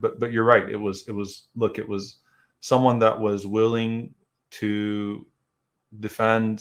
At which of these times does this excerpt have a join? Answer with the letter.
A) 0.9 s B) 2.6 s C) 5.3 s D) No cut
D